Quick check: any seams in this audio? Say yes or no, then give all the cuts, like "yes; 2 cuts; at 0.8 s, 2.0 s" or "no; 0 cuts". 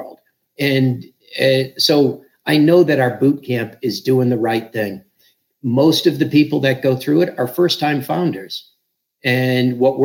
no; 0 cuts